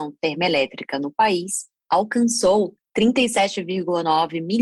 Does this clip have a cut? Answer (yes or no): no